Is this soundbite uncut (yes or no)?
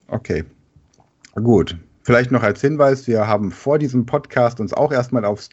yes